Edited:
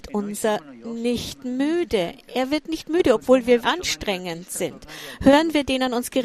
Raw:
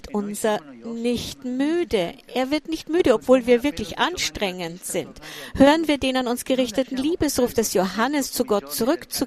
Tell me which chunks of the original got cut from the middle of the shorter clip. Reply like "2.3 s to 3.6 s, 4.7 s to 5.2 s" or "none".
3.6 s to 4.0 s